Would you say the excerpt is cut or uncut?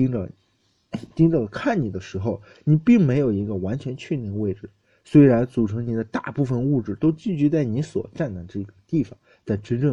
uncut